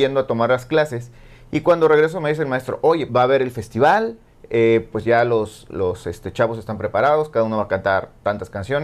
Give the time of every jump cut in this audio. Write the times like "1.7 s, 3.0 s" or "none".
3.1 s